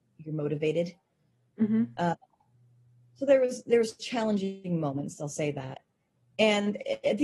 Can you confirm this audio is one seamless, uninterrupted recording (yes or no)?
yes